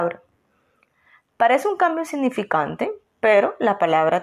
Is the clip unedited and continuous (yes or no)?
no